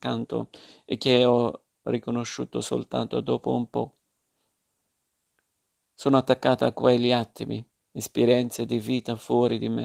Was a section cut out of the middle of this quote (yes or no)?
no